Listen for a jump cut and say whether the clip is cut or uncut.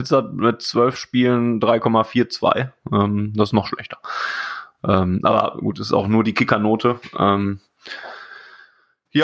uncut